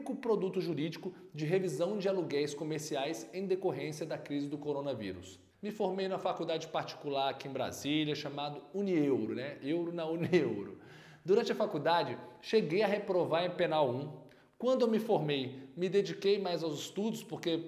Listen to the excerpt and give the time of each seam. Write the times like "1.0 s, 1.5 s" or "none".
5.5 s